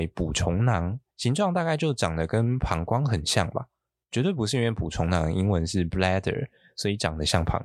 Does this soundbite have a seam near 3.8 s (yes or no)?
no